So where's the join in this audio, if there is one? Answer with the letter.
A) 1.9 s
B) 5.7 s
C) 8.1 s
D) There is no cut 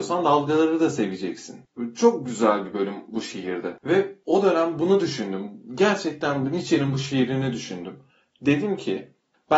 D